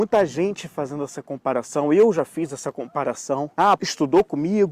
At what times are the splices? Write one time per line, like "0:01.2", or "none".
0:03.8